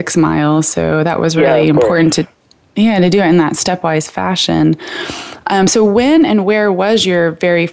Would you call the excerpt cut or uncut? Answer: uncut